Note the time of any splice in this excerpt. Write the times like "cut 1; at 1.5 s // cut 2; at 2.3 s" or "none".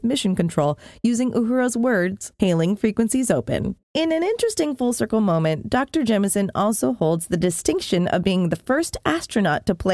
cut 1; at 3.8 s